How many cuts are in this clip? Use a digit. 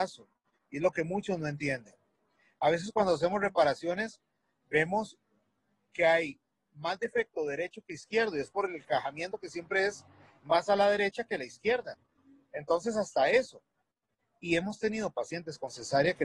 0